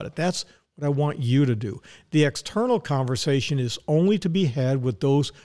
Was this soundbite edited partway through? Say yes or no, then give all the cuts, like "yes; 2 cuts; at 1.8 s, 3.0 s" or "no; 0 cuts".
no; 0 cuts